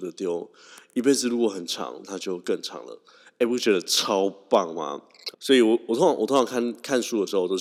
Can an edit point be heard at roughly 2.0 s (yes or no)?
yes